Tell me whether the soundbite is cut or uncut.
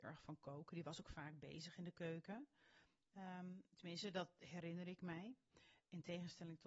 uncut